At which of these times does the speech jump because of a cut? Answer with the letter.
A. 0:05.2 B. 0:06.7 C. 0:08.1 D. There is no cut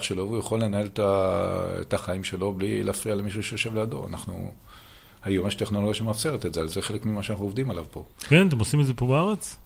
B